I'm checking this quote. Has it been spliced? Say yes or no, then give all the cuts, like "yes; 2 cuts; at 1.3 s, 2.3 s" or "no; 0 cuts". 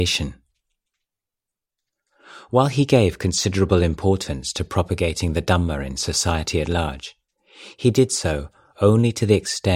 no; 0 cuts